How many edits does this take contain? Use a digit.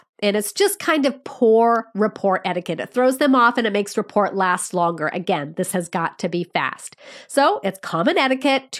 0